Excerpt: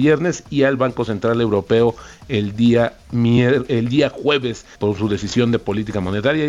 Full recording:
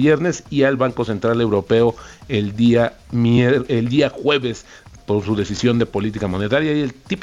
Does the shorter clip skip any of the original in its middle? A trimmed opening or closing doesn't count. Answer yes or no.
yes